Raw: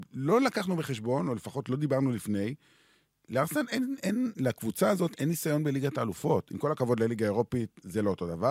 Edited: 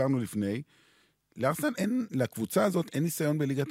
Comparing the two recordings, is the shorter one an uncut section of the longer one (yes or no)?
no